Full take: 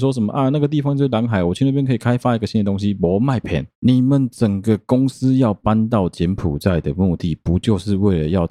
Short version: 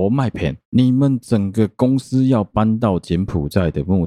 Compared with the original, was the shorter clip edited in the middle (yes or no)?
no